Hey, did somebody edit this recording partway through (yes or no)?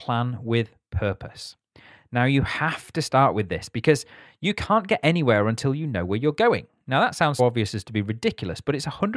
yes